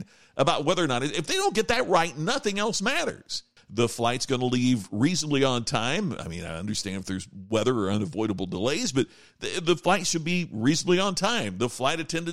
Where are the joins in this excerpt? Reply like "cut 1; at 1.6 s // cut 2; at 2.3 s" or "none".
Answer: cut 1; at 3.6 s